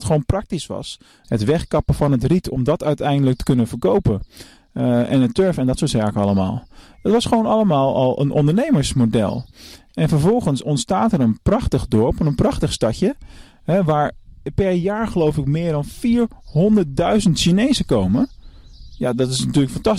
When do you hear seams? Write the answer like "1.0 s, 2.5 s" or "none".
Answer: 1.2 s